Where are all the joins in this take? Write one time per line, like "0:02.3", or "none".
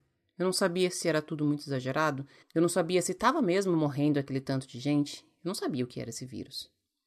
0:02.4